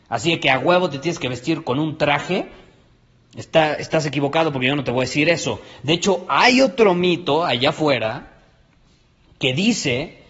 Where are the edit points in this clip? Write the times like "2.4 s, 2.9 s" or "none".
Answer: none